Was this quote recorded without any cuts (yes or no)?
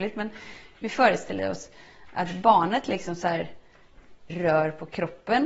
no